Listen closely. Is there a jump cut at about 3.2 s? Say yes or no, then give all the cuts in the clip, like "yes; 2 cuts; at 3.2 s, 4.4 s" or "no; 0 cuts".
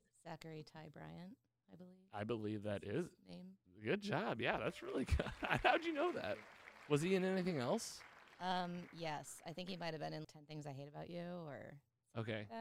no; 2 cuts; at 6.9 s, 10.2 s